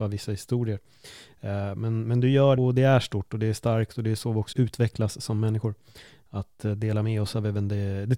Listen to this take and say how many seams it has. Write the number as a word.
two